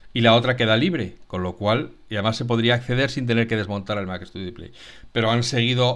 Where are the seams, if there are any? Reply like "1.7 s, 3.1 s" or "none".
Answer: none

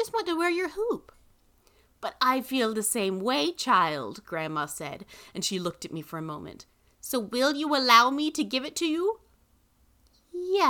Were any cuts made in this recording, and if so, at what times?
none

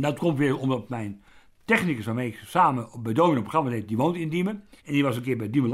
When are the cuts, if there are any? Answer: 4.8 s

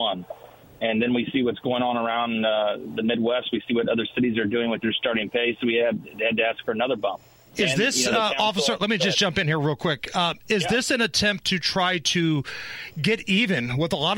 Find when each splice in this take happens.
7.5 s

